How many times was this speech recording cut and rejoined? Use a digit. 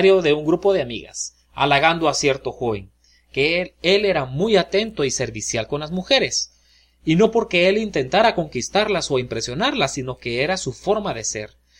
0